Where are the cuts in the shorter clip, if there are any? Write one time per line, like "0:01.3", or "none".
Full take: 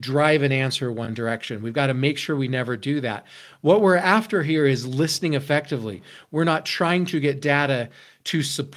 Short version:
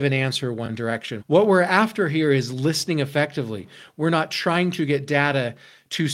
0:01.2